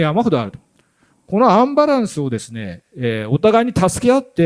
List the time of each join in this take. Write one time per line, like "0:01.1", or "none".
none